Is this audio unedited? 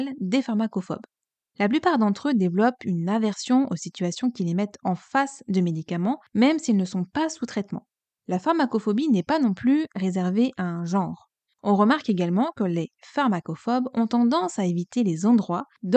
no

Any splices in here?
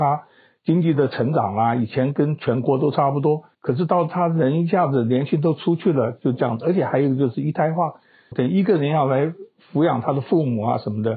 yes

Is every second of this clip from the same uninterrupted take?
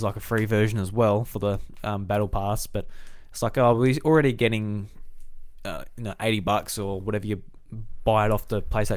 yes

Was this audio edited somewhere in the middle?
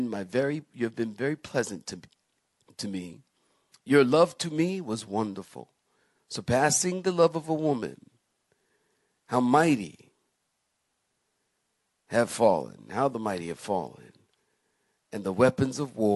no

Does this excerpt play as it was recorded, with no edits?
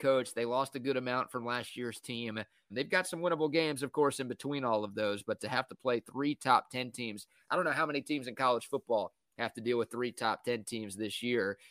no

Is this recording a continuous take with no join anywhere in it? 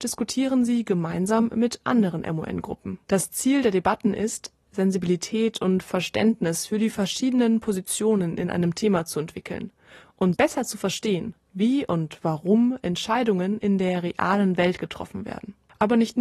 no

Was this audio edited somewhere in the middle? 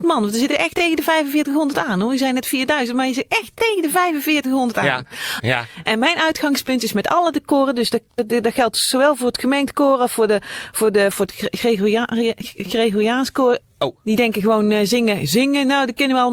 yes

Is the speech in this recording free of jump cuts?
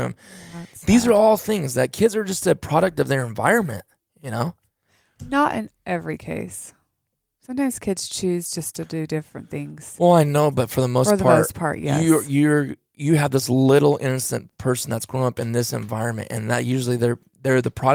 yes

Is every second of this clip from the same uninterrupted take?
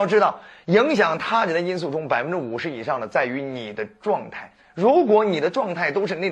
yes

